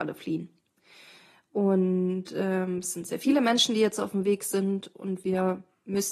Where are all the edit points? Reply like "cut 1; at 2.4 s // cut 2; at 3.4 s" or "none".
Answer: none